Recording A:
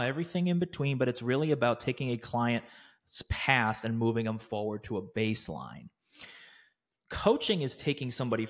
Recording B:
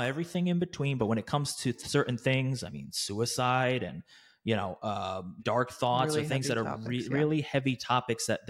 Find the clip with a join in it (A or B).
B